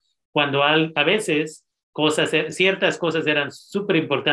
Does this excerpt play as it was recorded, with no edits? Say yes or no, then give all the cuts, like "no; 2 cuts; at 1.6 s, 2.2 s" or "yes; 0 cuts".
yes; 0 cuts